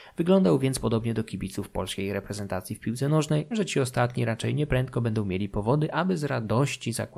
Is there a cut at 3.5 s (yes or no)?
yes